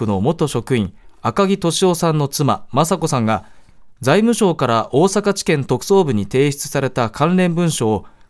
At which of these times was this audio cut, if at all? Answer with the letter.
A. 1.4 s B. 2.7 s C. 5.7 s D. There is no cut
D